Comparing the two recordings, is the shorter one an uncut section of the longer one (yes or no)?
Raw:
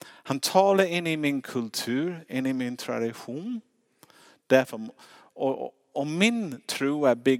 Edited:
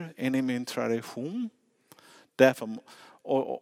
yes